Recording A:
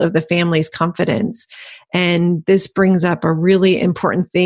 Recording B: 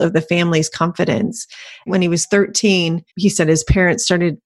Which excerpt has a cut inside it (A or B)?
B